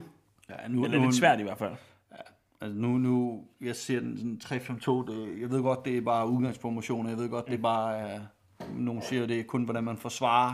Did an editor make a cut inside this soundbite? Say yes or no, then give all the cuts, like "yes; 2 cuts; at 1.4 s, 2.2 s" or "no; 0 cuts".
no; 0 cuts